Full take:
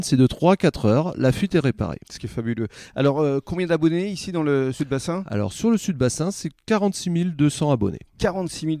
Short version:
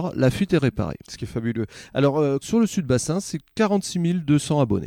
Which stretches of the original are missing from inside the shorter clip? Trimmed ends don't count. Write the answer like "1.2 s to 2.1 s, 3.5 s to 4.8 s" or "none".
3.4 s to 5.5 s